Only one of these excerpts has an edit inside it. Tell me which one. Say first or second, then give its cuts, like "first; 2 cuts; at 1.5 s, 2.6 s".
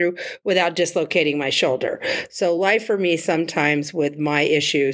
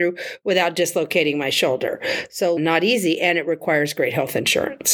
second; 1 cut; at 2.6 s